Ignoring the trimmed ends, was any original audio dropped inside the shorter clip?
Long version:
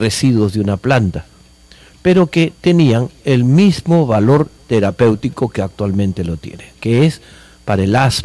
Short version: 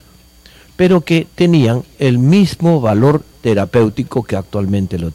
no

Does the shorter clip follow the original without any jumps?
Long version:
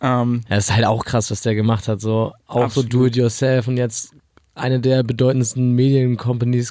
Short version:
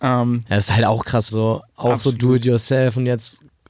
no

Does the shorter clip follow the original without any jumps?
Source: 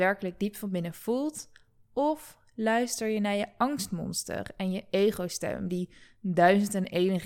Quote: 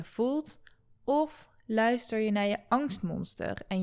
yes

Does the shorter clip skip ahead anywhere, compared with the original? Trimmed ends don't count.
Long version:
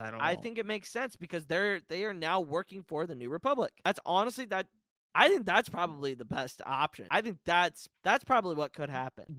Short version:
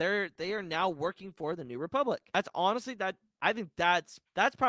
yes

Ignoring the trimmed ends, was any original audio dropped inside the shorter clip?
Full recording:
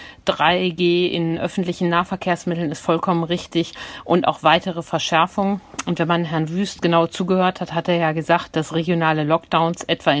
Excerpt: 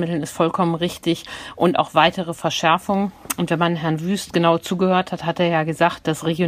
no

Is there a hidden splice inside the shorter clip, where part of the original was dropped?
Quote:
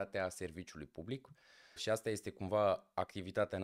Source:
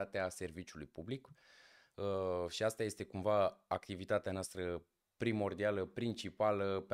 yes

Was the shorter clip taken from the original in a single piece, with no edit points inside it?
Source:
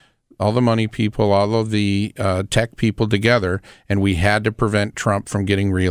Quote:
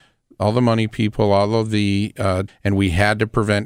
no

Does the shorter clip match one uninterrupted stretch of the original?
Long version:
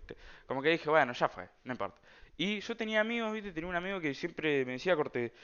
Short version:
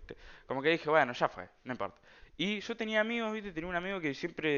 yes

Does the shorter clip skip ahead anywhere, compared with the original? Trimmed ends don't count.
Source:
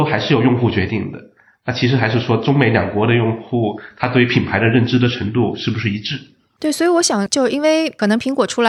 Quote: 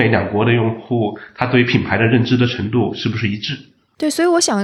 no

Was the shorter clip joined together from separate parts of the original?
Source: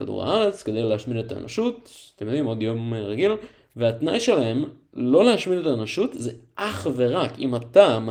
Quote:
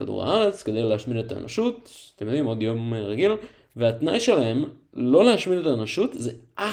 no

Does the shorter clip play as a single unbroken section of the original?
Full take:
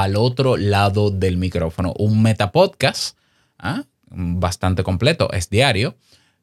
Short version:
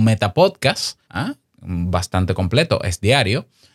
no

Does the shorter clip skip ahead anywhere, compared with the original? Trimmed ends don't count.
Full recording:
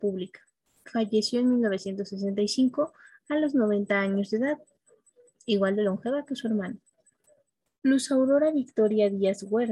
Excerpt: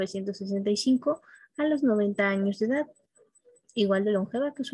no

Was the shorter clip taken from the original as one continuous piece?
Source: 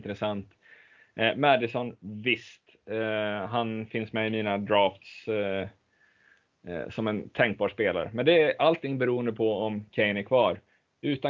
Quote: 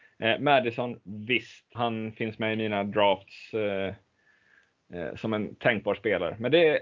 no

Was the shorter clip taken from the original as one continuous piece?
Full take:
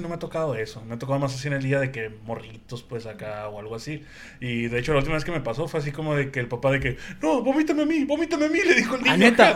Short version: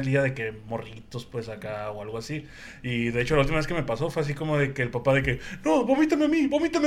yes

